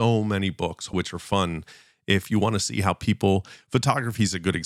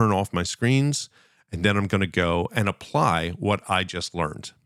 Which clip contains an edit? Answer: first; 1 cut; at 0.9 s

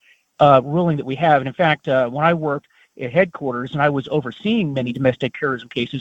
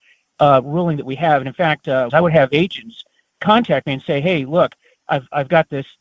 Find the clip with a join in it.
second; 1 cut; at 2.1 s

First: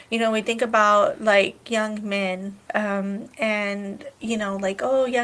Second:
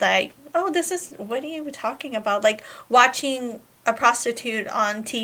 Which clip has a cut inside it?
first; 1 cut; at 2.6 s

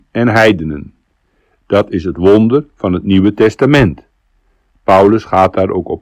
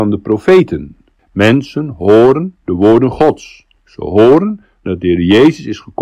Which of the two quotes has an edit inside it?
second; 1 cut; at 1.2 s

